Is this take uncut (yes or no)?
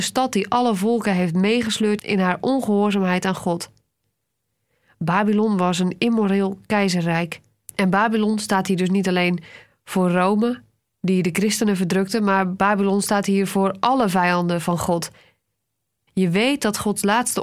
no